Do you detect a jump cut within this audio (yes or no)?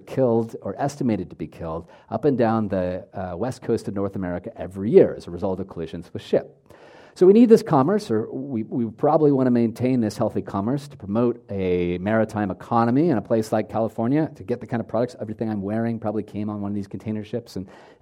no